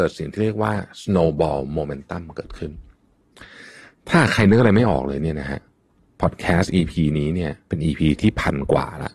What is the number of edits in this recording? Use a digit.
1